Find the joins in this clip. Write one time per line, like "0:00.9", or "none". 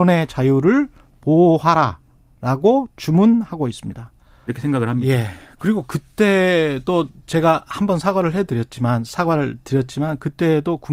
0:04.5

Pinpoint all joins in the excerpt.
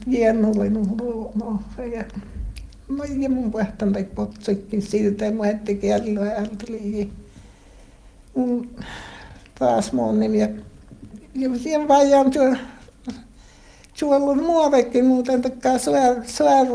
none

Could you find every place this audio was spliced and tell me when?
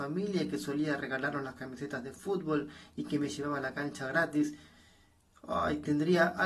none

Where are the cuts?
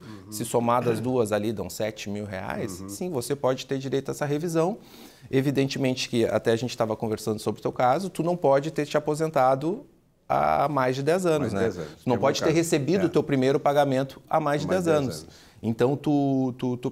none

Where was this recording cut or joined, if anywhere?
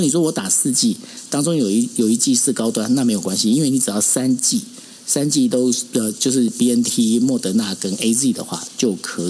none

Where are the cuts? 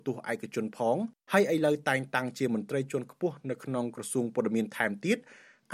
0:01.2

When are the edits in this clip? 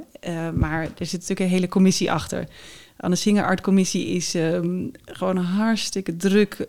none

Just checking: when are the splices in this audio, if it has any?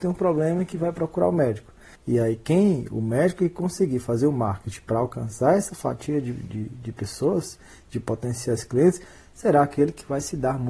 0:02.0

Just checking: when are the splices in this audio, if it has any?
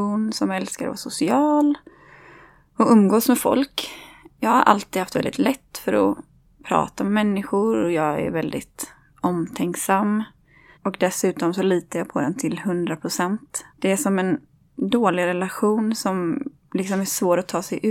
0:10.7
0:13.7

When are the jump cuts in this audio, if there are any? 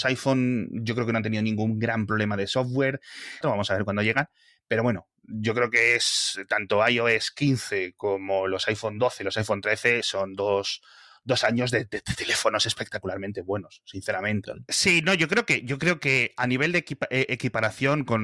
0:03.4
0:14.4

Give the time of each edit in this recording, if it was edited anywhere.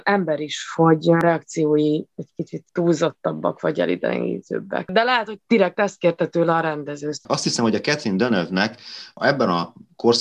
none

